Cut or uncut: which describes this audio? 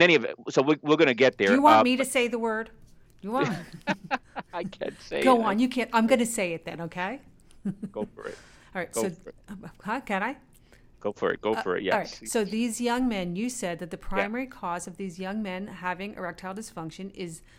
uncut